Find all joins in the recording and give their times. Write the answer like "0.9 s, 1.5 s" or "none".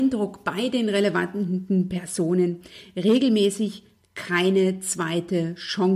none